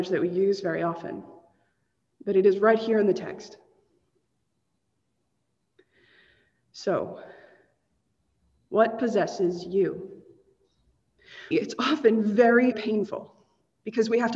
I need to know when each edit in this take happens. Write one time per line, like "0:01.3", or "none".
0:11.5
0:12.7